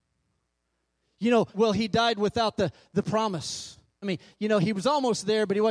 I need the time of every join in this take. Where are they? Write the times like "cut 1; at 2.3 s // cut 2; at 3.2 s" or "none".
cut 1; at 1.5 s // cut 2; at 4.0 s